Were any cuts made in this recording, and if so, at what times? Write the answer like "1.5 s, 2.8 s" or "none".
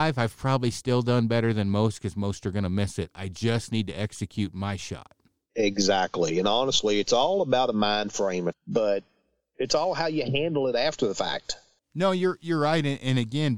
8.5 s